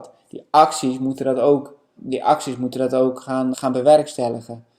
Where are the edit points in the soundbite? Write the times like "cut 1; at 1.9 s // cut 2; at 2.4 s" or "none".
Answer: cut 1; at 2.0 s // cut 2; at 3.5 s